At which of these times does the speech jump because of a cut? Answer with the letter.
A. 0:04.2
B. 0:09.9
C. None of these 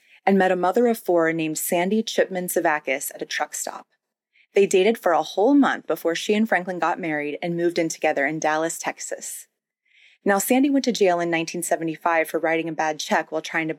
C